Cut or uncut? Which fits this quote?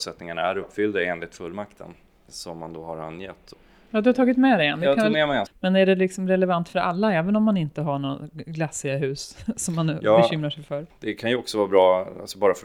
cut